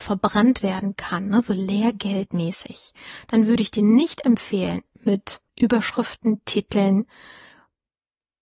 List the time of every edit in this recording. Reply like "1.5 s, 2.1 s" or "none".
5.5 s

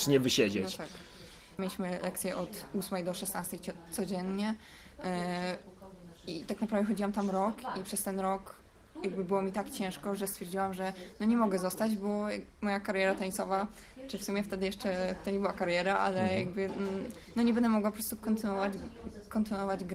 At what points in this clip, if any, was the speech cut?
1.6 s

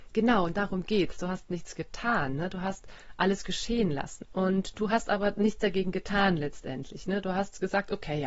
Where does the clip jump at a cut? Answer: 4.2 s

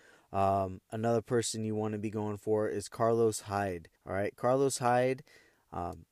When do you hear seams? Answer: 4.0 s

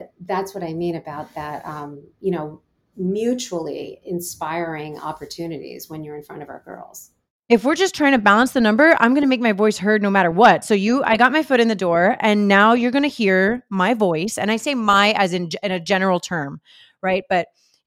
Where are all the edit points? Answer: none

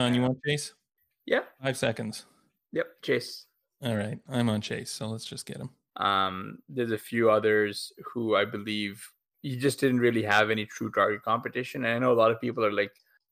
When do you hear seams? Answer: 5.9 s

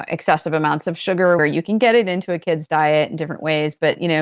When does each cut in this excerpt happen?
1.4 s

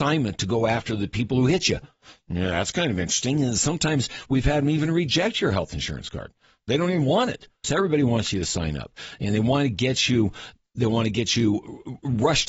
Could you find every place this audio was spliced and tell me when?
7.6 s

